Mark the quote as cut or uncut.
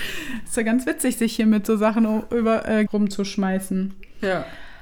cut